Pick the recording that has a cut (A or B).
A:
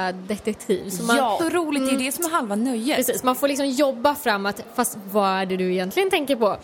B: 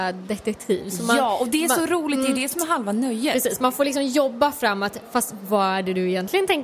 A